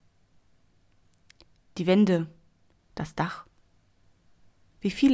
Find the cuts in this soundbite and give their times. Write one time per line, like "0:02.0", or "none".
0:02.8